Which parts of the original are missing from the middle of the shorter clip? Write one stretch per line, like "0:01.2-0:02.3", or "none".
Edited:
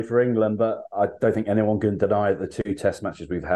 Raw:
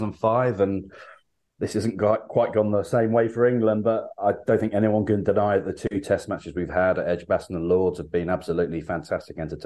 none